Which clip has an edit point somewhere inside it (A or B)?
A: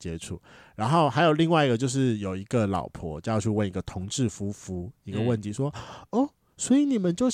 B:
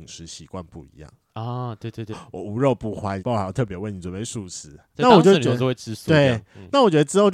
B